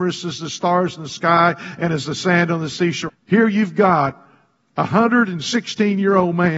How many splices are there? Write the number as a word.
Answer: one